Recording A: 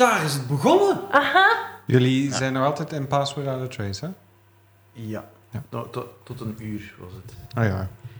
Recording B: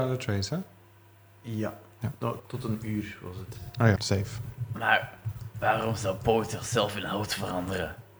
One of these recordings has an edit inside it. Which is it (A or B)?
B